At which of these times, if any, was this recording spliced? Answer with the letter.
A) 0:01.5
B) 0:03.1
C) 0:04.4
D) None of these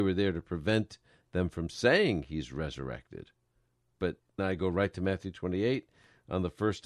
C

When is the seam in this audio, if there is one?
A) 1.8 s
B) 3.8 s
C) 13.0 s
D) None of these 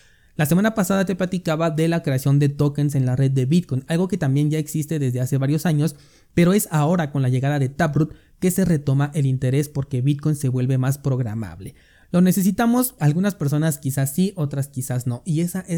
C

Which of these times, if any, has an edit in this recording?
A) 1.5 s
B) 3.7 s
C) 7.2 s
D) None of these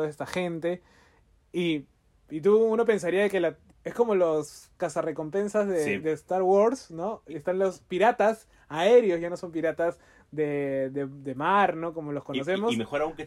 B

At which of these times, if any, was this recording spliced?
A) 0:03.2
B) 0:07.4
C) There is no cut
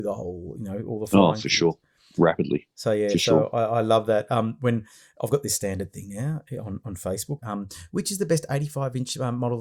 B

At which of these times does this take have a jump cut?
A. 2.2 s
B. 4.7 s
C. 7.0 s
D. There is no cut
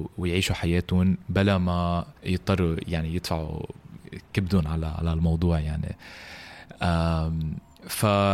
A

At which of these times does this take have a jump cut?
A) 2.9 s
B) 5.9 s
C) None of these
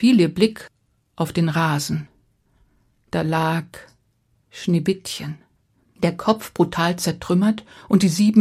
B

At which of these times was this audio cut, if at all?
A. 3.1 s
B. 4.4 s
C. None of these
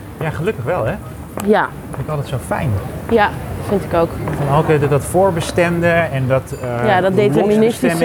C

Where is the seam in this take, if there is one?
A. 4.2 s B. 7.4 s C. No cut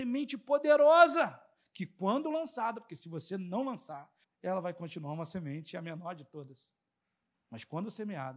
A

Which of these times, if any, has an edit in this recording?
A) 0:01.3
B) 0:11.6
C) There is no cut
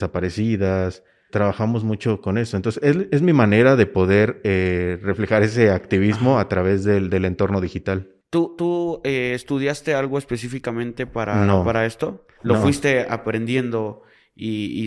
A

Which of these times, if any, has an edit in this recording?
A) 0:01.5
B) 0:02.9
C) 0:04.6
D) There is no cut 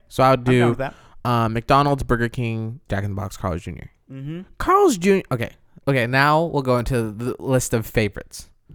B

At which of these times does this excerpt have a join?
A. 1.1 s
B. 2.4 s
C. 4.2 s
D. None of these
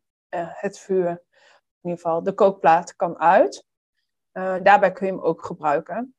C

